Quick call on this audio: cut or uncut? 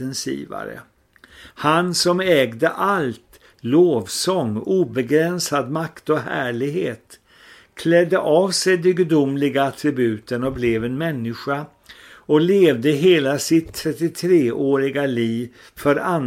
cut